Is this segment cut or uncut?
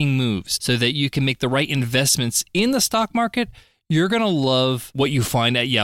uncut